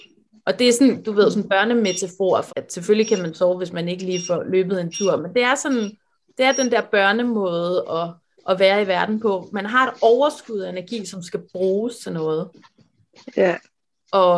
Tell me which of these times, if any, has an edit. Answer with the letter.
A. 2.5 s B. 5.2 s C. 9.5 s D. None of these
A